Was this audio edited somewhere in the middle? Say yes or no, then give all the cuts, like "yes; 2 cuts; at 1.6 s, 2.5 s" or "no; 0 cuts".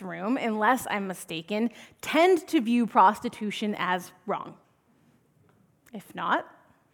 no; 0 cuts